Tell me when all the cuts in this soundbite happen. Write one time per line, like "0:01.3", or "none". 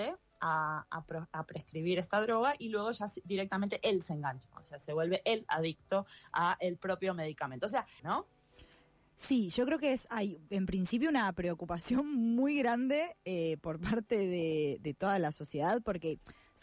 0:08.0